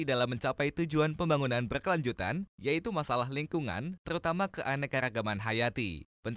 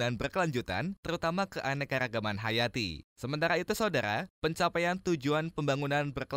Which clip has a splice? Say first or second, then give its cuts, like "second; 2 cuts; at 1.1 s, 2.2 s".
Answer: second; 2 cuts; at 1.0 s, 3.1 s